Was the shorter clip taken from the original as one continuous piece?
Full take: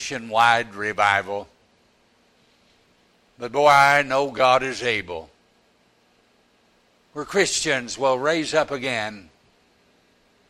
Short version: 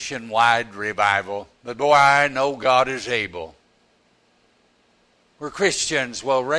no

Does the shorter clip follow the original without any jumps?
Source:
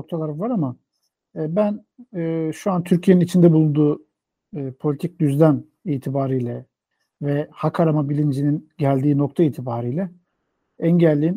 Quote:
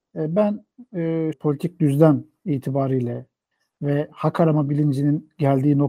no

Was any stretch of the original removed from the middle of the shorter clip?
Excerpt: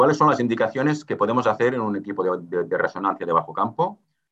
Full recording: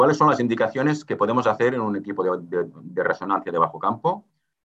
yes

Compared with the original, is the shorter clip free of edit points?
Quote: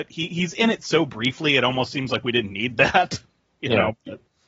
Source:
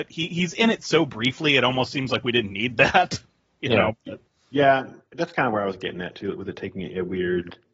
yes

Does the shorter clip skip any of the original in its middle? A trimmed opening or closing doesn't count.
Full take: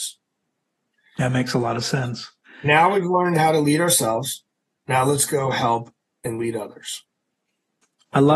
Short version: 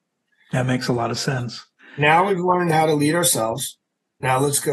no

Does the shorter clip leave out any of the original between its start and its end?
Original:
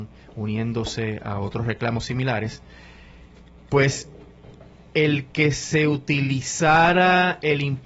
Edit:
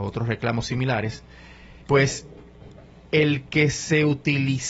yes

